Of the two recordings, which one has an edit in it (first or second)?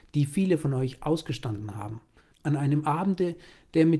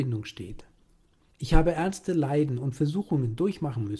first